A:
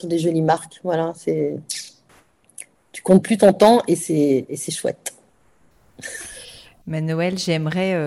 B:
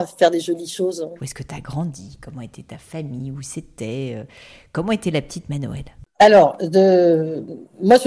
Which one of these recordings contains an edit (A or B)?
B